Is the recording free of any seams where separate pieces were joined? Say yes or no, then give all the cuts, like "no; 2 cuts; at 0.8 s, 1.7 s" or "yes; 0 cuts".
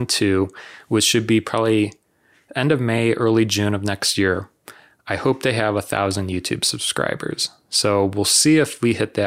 yes; 0 cuts